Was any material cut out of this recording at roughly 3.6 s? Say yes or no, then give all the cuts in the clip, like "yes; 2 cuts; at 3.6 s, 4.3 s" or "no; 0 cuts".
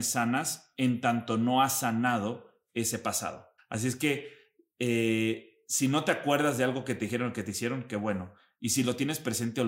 yes; 1 cut; at 3.6 s